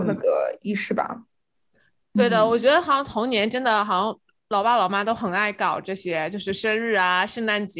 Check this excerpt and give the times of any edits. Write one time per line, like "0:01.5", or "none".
none